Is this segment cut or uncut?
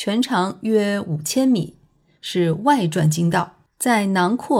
cut